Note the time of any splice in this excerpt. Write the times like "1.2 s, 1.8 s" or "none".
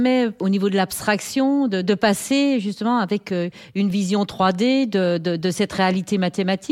1.8 s